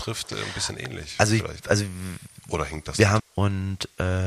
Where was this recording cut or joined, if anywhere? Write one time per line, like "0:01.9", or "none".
0:03.2